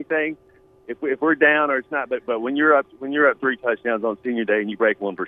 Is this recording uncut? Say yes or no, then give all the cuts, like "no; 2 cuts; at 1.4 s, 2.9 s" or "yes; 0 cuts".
yes; 0 cuts